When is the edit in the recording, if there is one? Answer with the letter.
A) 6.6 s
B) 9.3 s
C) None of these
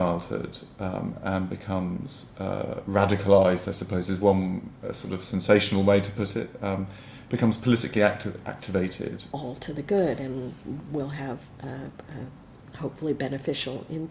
B